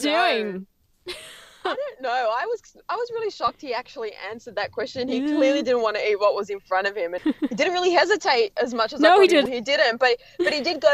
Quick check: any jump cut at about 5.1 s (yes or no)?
no